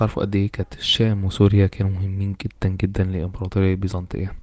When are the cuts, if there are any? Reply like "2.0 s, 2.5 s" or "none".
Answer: none